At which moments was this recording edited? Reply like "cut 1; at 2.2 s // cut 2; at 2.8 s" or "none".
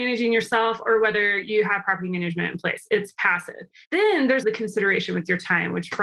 cut 1; at 4.4 s